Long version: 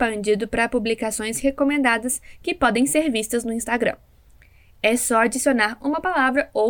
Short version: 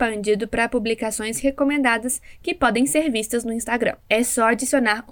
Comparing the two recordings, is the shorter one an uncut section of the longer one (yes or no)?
no